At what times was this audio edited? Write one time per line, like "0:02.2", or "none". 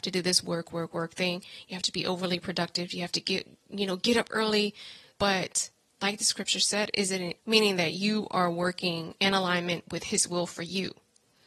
0:05.1
0:07.4